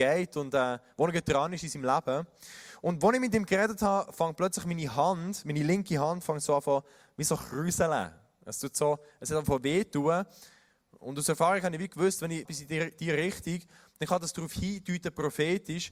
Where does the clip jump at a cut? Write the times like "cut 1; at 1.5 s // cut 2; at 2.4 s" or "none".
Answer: cut 1; at 12.5 s